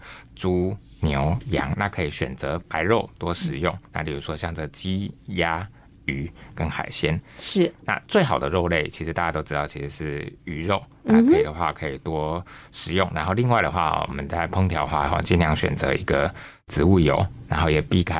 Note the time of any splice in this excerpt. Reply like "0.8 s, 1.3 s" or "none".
none